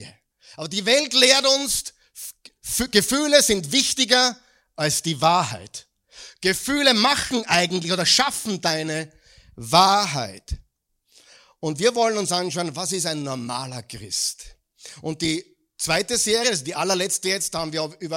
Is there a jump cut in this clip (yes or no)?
no